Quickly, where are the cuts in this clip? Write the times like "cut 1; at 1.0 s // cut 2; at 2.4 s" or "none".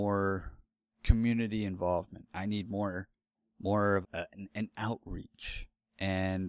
cut 1; at 4.0 s